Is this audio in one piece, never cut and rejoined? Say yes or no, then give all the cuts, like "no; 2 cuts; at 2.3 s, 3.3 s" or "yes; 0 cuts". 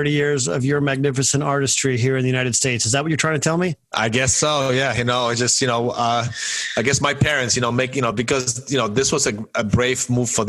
yes; 0 cuts